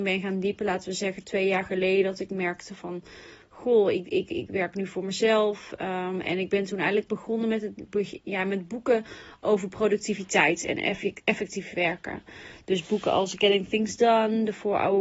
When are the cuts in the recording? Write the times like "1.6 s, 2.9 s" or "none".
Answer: none